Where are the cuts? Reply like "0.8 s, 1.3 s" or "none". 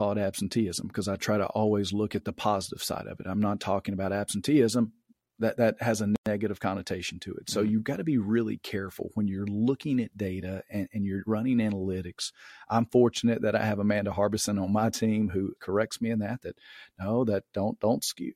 15.6 s